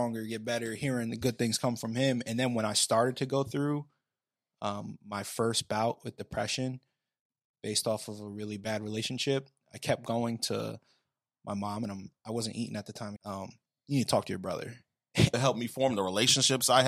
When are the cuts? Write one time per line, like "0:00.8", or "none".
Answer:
0:13.2
0:15.3